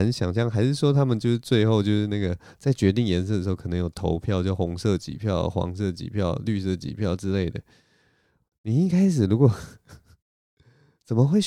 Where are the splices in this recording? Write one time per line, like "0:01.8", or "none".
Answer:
none